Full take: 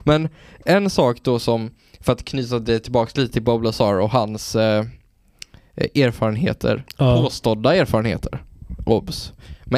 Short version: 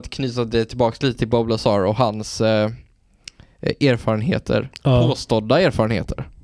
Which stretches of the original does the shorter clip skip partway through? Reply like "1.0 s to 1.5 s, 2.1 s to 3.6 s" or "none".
none